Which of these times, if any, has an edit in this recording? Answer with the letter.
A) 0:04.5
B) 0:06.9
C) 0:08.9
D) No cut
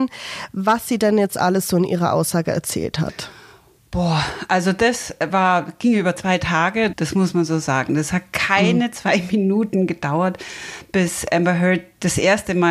B